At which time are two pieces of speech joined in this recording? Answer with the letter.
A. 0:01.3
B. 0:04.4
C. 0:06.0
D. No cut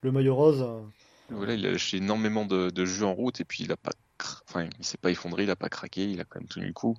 A